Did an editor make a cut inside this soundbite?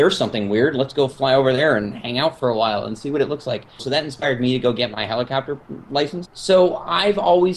yes; 2 cuts; at 3.8 s, 6.3 s

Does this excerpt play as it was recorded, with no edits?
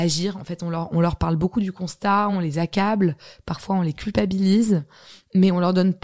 yes; 0 cuts

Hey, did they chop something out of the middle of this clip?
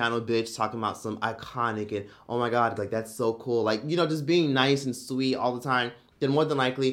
yes; 1 cut; at 2.8 s

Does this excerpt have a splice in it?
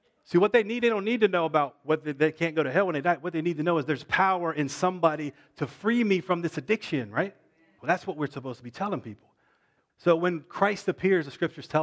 yes; 2 cuts; at 7.8 s, 9.9 s

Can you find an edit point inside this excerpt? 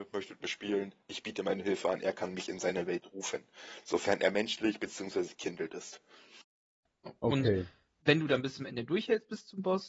no; 0 cuts

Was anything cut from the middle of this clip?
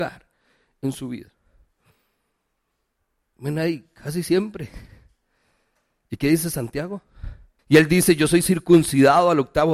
yes; 1 cut; at 7.6 s

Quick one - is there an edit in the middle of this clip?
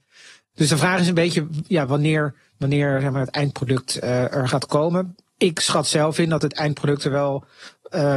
no; 0 cuts

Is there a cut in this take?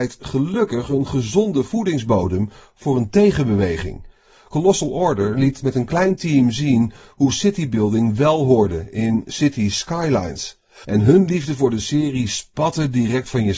yes; 1 cut; at 10.8 s

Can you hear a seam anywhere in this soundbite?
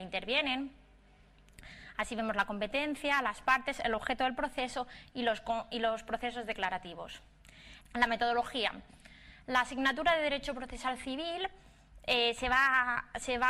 yes; 1 cut; at 7.8 s

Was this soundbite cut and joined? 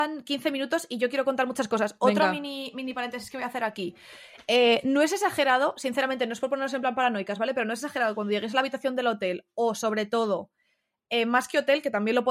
no; 0 cuts

